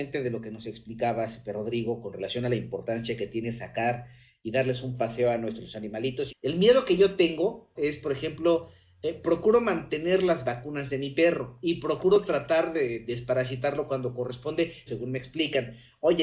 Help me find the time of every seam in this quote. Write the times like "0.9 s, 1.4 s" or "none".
6.3 s, 7.8 s, 14.9 s